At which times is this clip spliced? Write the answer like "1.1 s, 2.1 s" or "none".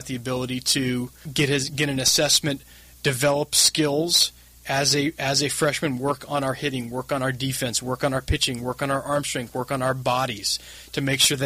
none